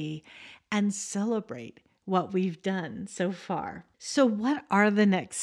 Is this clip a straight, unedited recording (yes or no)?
no